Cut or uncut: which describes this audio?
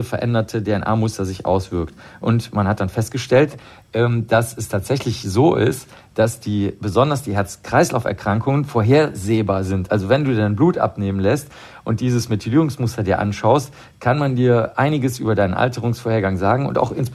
uncut